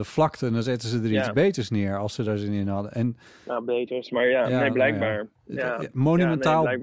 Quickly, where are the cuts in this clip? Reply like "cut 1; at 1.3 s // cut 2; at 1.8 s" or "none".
none